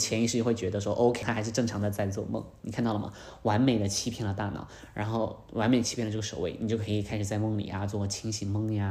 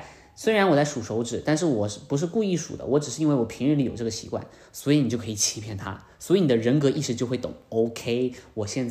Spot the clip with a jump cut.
first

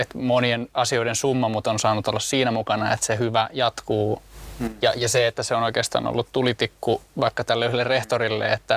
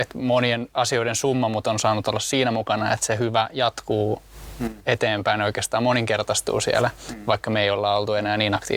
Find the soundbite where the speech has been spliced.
first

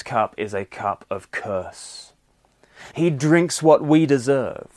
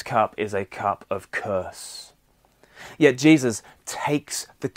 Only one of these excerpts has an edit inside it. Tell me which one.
first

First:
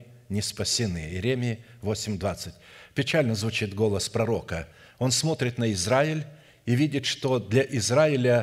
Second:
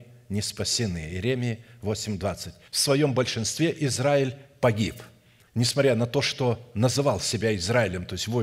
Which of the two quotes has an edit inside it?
second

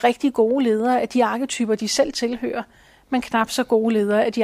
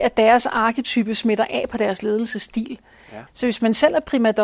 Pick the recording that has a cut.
second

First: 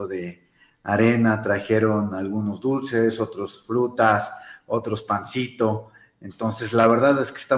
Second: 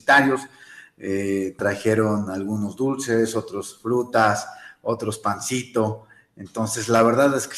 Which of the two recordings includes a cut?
second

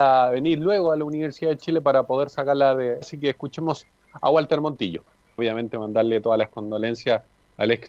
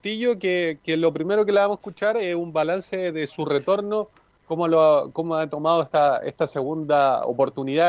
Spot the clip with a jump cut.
first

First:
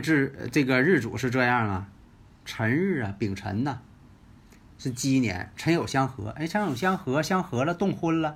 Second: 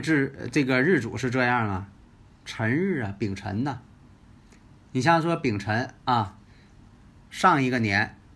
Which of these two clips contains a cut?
first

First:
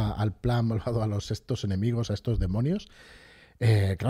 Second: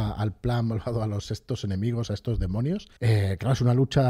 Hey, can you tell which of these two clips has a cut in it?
second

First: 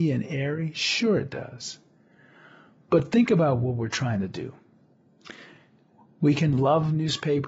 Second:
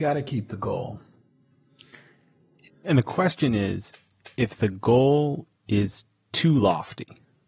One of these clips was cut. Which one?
second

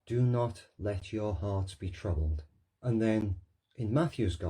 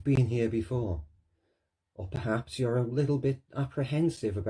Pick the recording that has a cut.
first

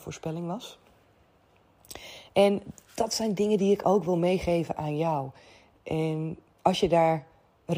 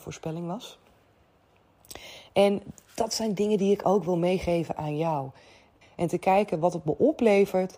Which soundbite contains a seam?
second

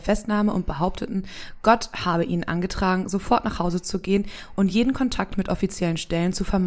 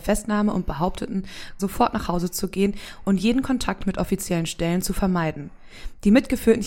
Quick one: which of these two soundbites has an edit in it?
second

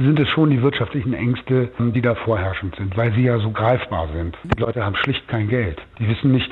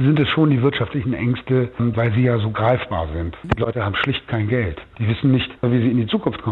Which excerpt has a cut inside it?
second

